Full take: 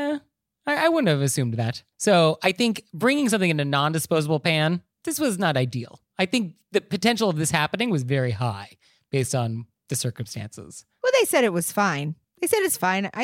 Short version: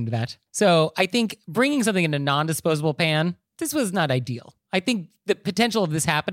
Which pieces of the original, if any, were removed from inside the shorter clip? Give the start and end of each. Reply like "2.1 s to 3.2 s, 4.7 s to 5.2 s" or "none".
none